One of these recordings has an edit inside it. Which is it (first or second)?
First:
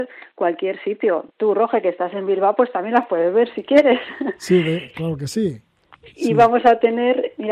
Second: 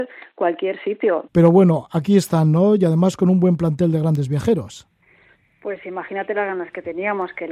second